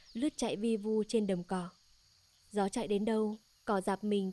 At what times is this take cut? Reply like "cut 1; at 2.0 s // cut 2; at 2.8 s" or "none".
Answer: none